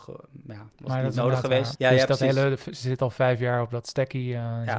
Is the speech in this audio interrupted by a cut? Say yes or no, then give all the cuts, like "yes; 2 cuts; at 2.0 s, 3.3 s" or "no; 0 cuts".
yes; 1 cut; at 1.8 s